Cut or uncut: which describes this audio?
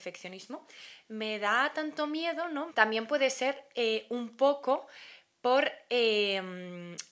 cut